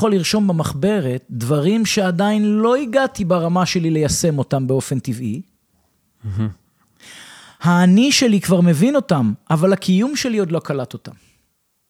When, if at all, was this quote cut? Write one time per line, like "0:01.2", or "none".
none